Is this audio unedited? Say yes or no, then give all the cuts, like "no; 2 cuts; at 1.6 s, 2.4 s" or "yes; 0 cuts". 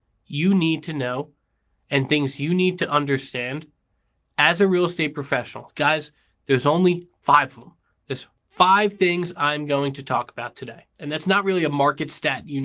no; 1 cut; at 11.0 s